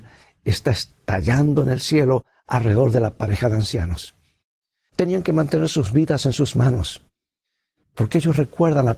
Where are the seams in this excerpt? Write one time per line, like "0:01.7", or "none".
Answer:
0:04.9
0:07.8